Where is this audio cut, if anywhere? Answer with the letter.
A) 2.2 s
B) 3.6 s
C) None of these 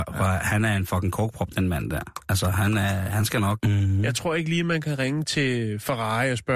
B